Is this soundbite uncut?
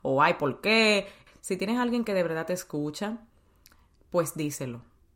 no; 1 cut; at 1.3 s

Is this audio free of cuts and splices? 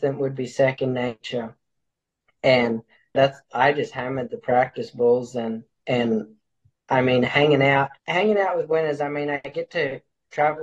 no; 2 cuts; at 3.1 s, 8.0 s

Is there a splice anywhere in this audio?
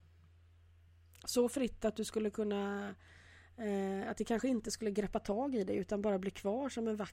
no; 0 cuts

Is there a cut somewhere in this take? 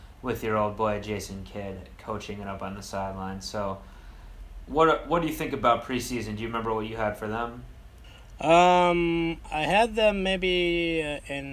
no; 0 cuts

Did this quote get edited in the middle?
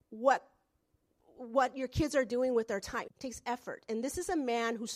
yes; 1 cut; at 3.0 s

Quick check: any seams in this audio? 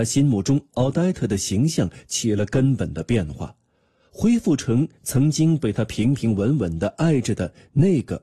no; 0 cuts

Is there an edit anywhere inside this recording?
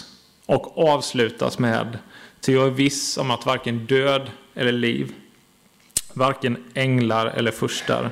no; 0 cuts

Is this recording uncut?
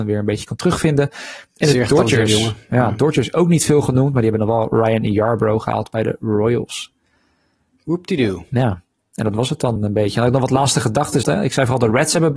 no; 2 cuts; at 9.8 s, 11.2 s

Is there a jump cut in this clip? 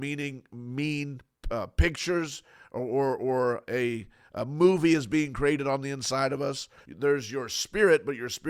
yes; 1 cut; at 6.8 s

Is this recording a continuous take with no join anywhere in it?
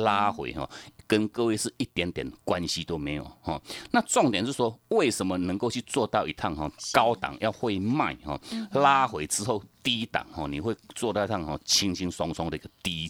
yes; 0 cuts

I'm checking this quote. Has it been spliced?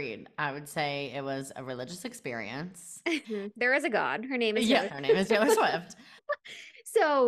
yes; 3 cuts; at 3.2 s, 4.9 s, 6.2 s

